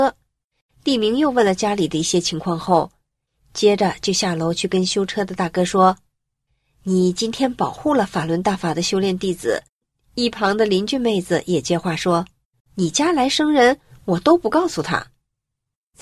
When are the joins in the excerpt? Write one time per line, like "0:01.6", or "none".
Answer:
0:09.7